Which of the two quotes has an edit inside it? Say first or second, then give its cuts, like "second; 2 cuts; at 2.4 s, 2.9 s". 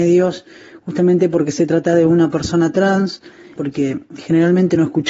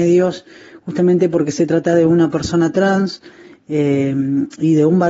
first; 1 cut; at 3.6 s